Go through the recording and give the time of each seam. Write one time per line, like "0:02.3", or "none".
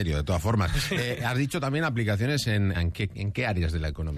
0:02.7